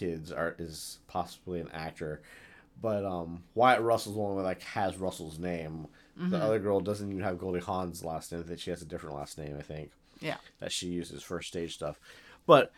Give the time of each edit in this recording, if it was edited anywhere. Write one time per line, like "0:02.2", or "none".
none